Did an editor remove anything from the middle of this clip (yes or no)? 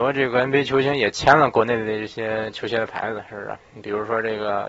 no